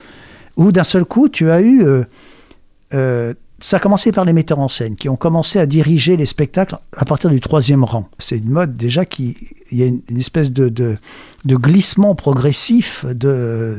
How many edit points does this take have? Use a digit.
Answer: 1